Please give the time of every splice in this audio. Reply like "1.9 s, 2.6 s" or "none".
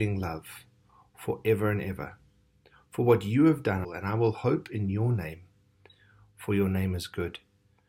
3.8 s